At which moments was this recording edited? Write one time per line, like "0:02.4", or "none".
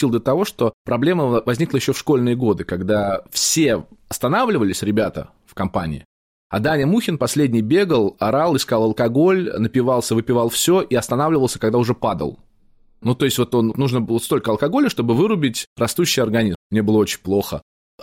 0:13.7
0:16.5